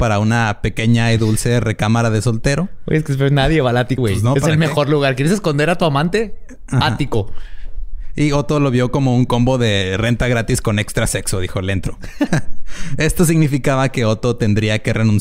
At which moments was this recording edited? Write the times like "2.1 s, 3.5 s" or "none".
4.0 s, 12.3 s